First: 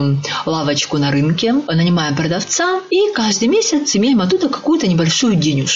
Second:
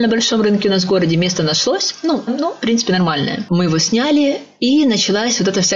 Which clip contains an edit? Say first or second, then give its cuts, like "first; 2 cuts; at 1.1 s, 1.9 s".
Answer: second; 1 cut; at 2.3 s